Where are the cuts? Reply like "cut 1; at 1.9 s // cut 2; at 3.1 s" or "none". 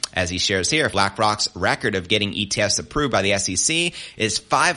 cut 1; at 0.9 s